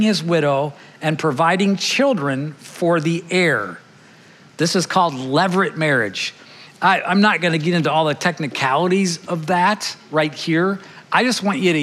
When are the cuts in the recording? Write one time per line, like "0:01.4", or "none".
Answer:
none